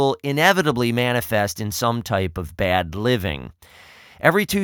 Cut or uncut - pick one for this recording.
uncut